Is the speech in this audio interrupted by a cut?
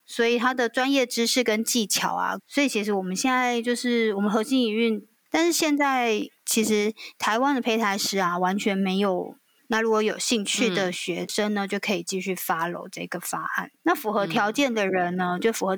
yes; 3 cuts; at 2.4 s, 5.2 s, 9.6 s

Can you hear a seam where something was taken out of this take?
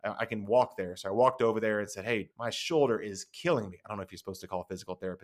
yes; 1 cut; at 2.3 s

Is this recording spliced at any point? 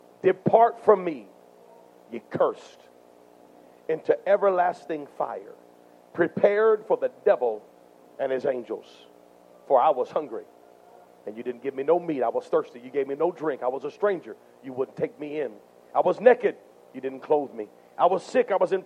no; 0 cuts

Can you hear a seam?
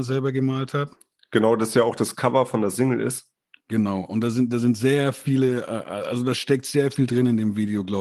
no; 0 cuts

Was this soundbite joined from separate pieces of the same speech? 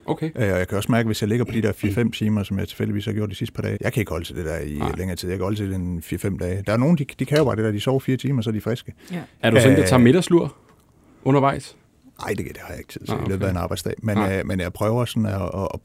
yes; 2 cuts; at 3.8 s, 9.4 s

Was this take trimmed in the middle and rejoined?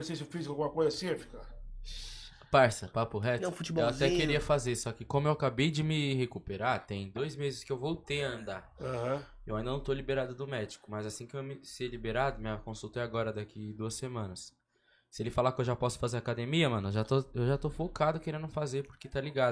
no; 0 cuts

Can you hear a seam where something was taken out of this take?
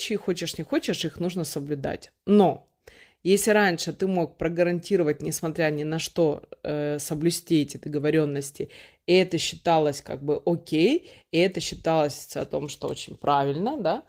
no; 0 cuts

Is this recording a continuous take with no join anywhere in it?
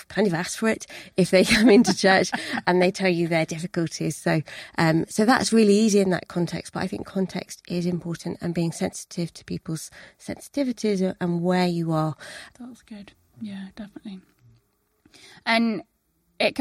no; 1 cut; at 12.5 s

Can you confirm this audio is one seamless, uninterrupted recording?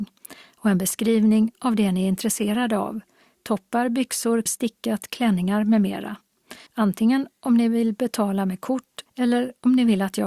no; 3 cuts; at 4.5 s, 6.7 s, 9.1 s

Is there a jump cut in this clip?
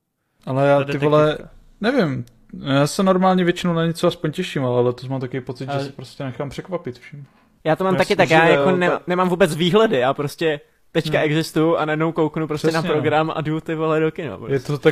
no; 0 cuts

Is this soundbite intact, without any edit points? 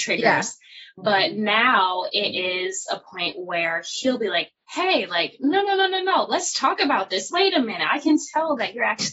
yes; 0 cuts

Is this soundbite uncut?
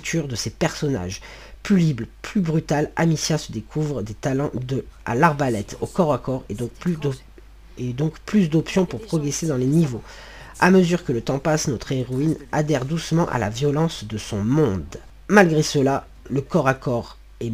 yes; 0 cuts

